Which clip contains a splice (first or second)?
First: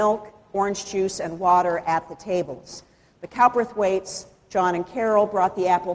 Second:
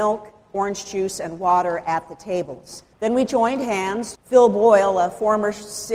second